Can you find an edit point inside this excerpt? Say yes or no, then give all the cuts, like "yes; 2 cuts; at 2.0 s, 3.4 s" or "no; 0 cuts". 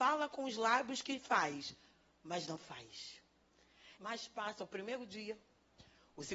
yes; 1 cut; at 4.0 s